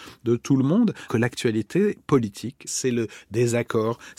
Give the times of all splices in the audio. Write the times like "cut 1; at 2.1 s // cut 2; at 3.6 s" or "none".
cut 1; at 1.1 s // cut 2; at 2.7 s